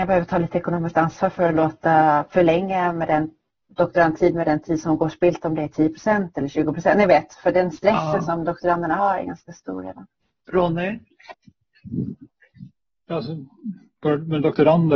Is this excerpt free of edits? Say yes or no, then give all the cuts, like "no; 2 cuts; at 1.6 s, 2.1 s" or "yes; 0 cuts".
yes; 0 cuts